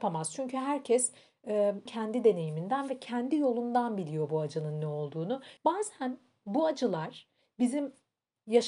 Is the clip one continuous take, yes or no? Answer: no